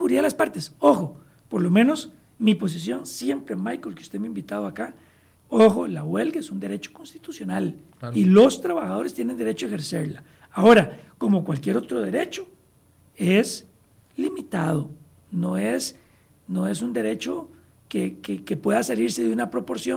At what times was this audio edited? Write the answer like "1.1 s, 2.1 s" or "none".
5.4 s